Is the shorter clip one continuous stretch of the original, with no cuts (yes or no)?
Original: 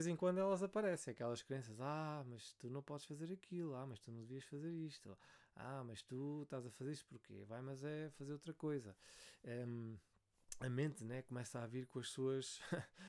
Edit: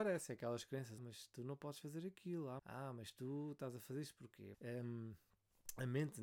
no